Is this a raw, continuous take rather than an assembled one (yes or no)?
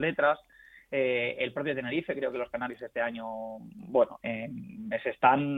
yes